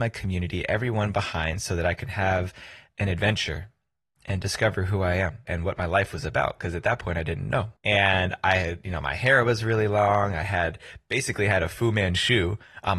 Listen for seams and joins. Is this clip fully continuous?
no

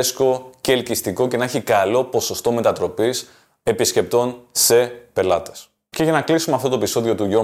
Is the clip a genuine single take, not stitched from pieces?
yes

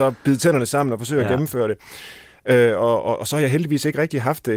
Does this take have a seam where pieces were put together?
no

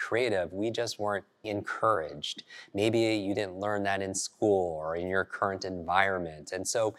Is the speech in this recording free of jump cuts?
no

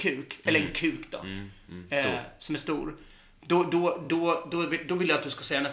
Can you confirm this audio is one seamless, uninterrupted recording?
yes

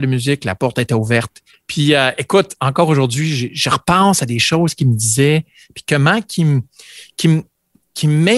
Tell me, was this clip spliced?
yes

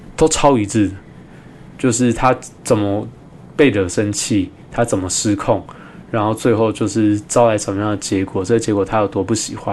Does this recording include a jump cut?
no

